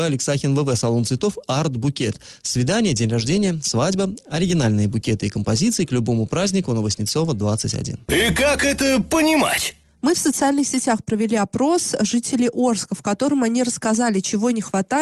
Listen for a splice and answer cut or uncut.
uncut